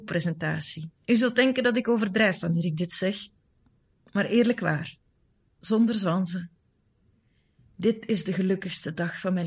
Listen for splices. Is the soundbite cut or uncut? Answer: cut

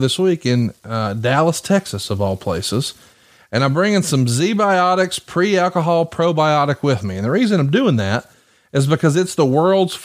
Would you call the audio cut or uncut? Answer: uncut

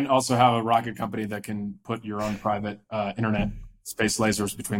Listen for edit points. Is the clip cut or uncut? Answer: uncut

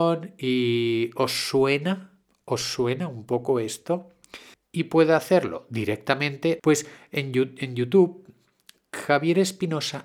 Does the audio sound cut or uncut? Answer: cut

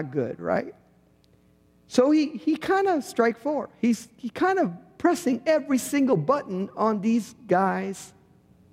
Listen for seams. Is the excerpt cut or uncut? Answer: uncut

